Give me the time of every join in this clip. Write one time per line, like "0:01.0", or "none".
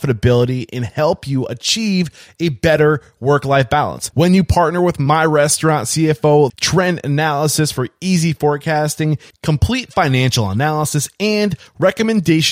0:04.1
0:06.5
0:09.3